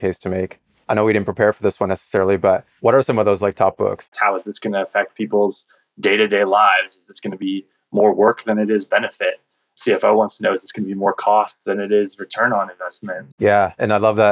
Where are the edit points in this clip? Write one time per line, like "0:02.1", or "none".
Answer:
0:04.1
0:13.3